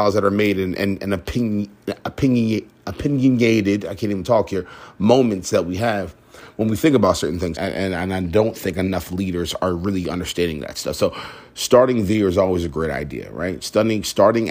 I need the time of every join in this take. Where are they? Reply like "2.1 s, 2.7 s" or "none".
7.5 s